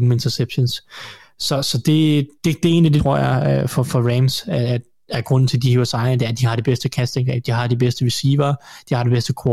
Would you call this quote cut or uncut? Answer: cut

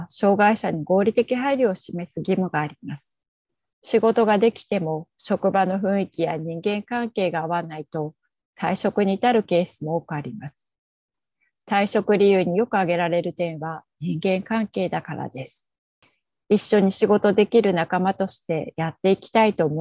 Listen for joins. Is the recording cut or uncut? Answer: cut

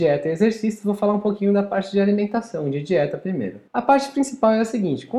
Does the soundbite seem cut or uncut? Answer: cut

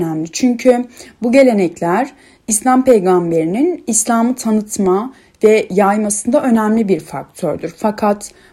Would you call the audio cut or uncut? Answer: uncut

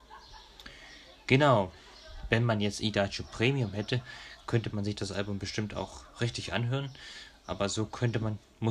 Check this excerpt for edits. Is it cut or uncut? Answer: uncut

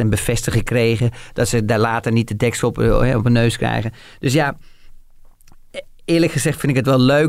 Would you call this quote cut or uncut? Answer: uncut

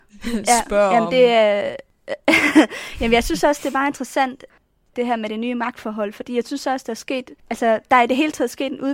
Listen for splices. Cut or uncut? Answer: uncut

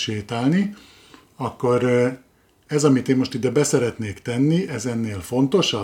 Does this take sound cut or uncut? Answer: uncut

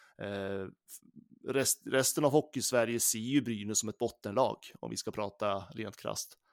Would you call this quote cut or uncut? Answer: uncut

